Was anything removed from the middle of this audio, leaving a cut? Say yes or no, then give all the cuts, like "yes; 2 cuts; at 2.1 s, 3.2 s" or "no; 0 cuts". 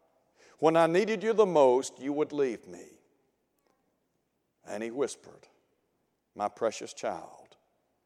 no; 0 cuts